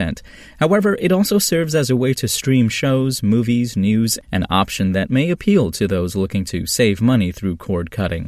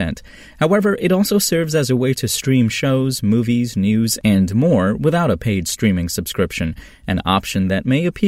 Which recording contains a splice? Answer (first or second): first